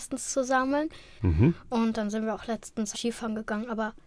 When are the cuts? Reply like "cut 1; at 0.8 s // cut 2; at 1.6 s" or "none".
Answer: cut 1; at 1.2 s // cut 2; at 2.9 s